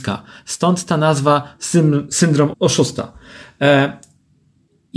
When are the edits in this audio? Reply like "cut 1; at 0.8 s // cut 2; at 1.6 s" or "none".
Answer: cut 1; at 2.5 s

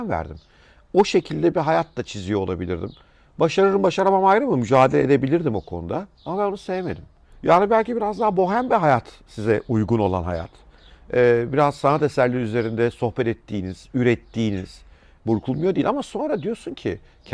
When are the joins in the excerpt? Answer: cut 1; at 7.3 s // cut 2; at 15.2 s

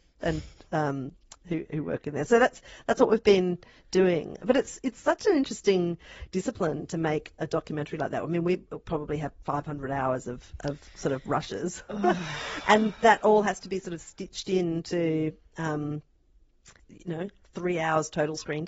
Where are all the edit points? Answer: cut 1; at 16.8 s

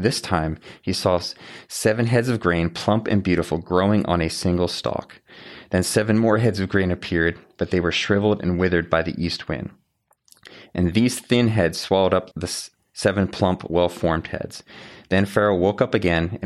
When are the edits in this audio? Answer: cut 1; at 12.3 s

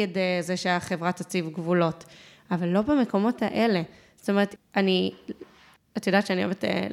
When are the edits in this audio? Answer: cut 1; at 4.6 s

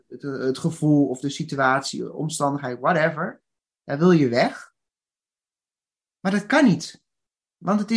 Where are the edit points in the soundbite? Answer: none

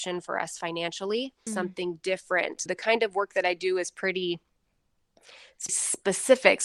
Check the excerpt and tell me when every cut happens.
cut 1; at 1.5 s // cut 2; at 2.7 s // cut 3; at 5.7 s

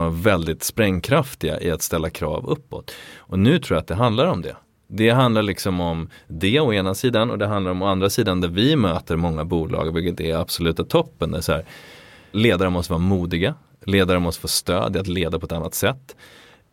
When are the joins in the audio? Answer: cut 1; at 12.3 s

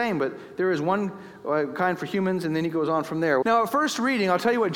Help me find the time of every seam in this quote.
cut 1; at 3.4 s

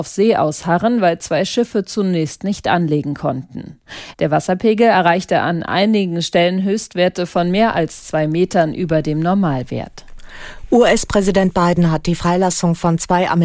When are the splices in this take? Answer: cut 1; at 4.1 s

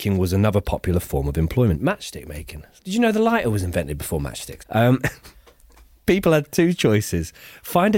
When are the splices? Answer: cut 1; at 4.6 s

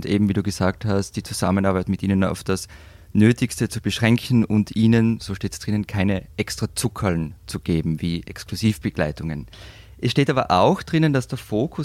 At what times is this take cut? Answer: none

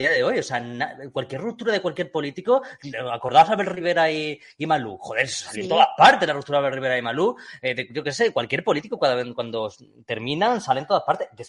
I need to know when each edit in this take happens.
none

